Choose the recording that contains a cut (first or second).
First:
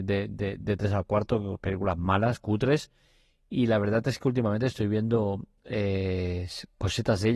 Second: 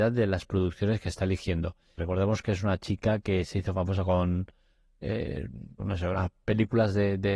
second